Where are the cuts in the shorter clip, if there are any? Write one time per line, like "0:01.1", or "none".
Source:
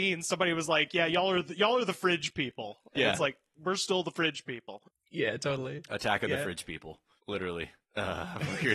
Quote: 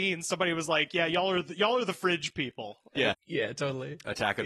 0:03.1